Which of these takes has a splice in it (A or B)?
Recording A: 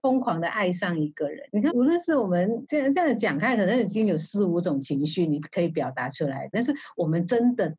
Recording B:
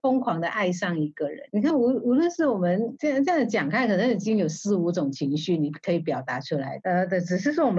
A